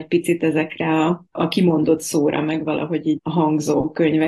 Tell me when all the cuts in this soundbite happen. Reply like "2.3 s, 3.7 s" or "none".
1.3 s, 3.2 s